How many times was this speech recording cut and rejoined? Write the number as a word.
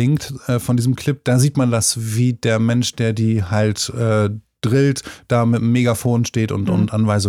zero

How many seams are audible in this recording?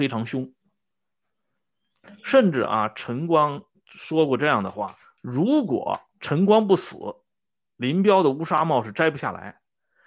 two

